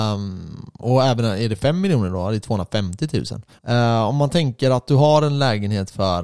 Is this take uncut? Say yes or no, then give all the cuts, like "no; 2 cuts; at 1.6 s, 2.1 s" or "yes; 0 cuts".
no; 1 cut; at 3.6 s